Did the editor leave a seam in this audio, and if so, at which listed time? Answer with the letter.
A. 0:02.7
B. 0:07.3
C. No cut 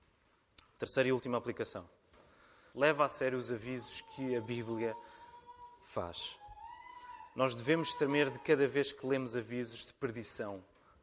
A